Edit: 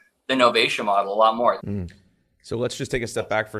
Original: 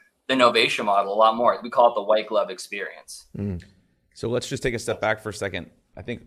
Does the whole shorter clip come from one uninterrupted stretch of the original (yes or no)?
no